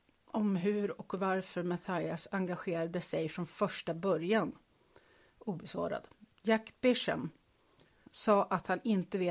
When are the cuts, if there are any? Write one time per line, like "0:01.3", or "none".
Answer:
0:08.1